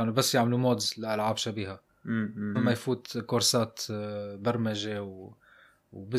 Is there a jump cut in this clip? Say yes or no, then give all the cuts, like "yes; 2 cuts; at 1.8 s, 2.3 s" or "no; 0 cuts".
yes; 1 cut; at 2.5 s